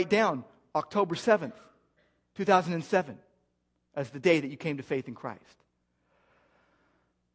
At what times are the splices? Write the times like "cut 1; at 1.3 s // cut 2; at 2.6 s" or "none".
none